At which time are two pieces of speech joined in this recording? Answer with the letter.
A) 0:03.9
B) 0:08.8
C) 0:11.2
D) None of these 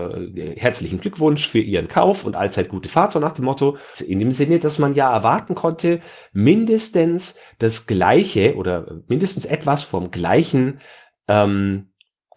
A